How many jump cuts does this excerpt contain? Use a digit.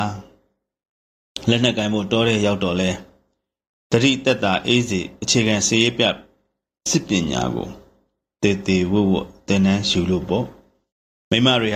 0